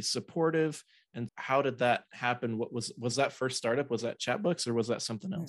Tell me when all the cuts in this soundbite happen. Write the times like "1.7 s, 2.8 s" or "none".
1.3 s